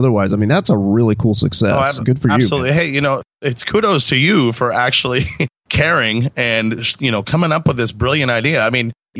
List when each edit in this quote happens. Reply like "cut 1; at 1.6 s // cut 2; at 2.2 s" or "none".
none